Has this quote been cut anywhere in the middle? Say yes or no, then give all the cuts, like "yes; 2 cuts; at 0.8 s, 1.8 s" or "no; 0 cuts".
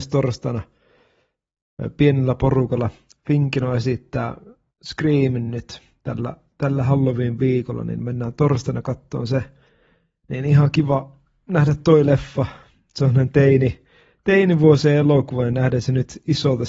no; 0 cuts